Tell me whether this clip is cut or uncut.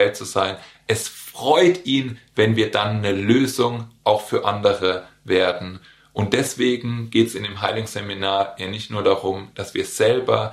uncut